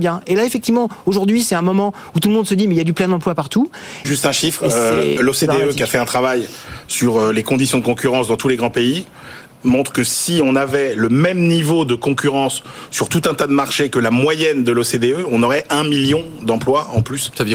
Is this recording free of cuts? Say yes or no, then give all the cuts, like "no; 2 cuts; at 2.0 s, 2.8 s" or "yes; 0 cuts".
no; 2 cuts; at 4.0 s, 5.2 s